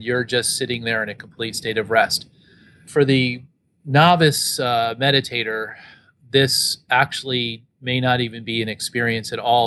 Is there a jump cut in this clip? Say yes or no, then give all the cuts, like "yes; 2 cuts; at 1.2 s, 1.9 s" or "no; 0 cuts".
no; 0 cuts